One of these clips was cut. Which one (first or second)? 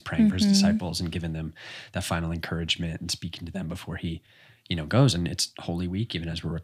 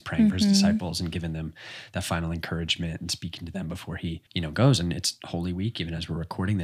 second